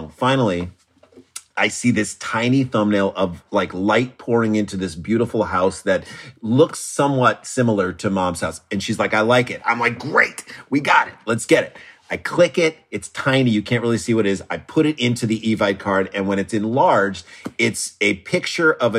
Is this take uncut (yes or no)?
yes